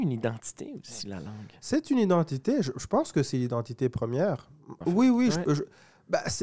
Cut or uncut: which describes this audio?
cut